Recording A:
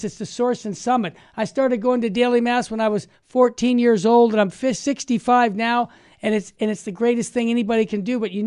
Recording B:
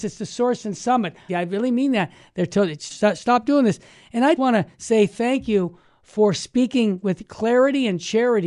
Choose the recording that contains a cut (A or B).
B